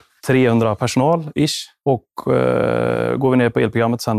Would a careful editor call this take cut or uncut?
uncut